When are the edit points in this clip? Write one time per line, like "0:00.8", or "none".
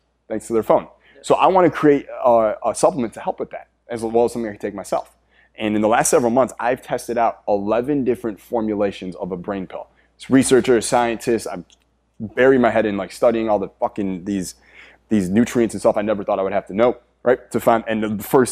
none